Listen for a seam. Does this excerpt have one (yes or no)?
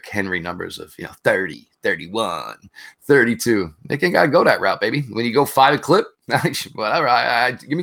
no